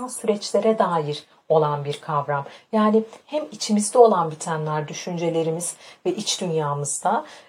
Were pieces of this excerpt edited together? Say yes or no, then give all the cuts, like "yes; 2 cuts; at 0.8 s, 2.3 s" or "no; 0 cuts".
yes; 1 cut; at 4.9 s